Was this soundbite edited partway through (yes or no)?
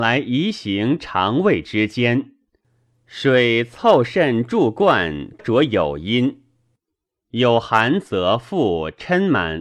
yes